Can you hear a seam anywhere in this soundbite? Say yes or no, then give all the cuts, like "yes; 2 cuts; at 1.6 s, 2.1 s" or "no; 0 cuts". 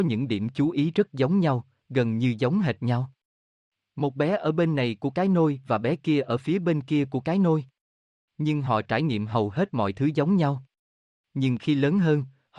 no; 0 cuts